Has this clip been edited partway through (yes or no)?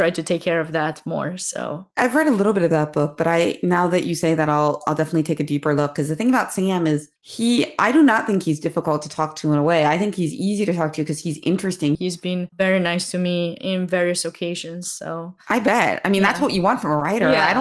yes